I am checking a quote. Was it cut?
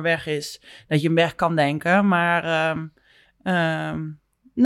no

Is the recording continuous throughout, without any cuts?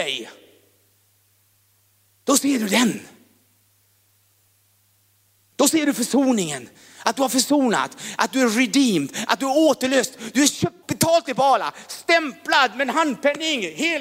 no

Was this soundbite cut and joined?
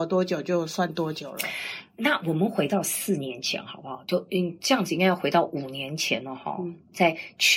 no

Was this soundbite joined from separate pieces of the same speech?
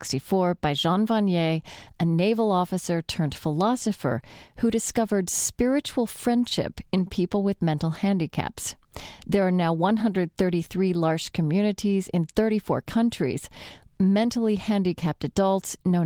no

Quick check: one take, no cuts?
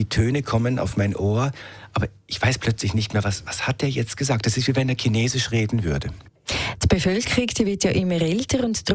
yes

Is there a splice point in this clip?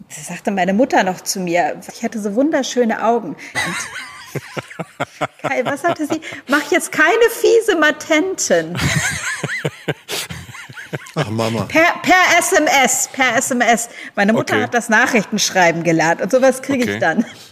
yes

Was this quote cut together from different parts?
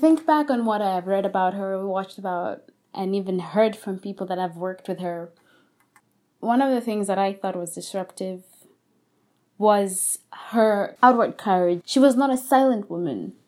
yes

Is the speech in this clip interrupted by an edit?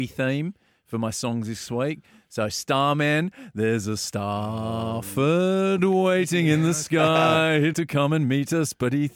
yes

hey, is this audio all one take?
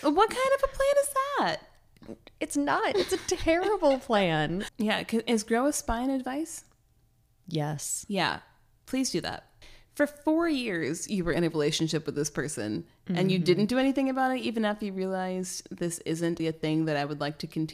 no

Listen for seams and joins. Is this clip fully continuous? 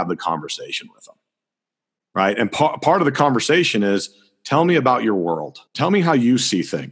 no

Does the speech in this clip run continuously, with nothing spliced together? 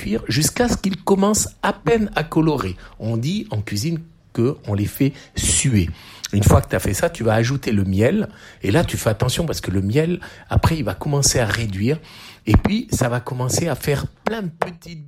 yes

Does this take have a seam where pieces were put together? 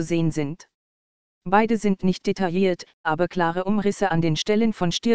yes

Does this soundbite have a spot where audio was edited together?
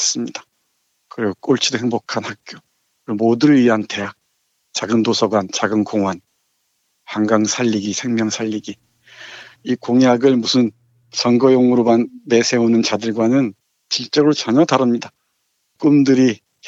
yes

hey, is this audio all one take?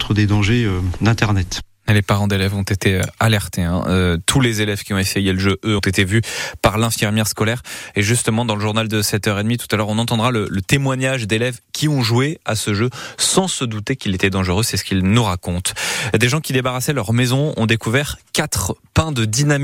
no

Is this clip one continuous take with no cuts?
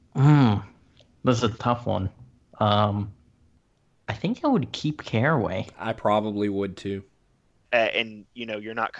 no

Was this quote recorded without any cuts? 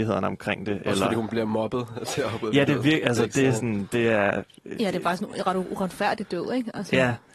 yes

